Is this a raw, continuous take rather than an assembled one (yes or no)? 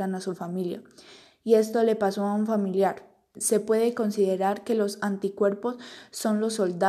no